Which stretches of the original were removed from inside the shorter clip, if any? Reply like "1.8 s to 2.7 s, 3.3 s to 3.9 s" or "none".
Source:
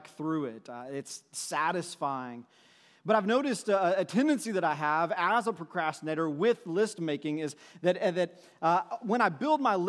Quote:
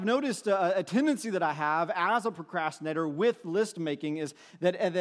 none